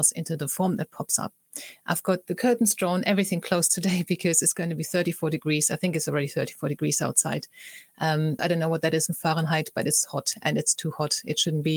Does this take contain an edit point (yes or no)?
yes